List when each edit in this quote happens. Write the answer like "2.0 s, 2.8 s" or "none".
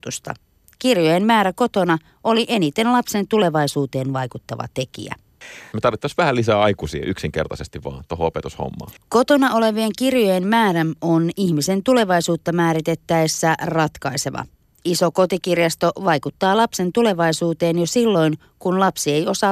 5.7 s